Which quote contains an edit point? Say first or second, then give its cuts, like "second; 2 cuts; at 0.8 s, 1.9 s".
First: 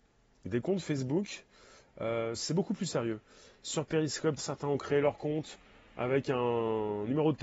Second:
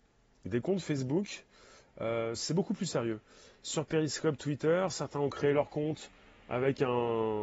first; 1 cut; at 4.4 s